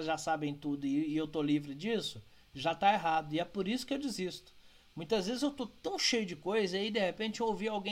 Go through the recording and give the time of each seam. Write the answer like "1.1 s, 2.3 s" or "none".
none